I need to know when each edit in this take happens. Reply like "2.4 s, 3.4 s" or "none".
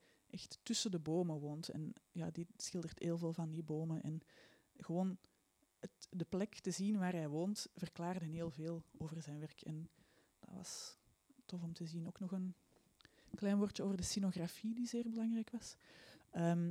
none